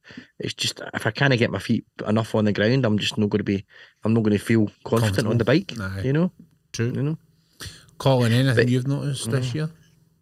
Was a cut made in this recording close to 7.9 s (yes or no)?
no